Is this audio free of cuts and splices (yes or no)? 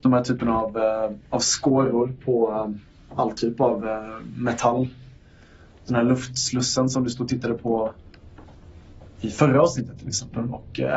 yes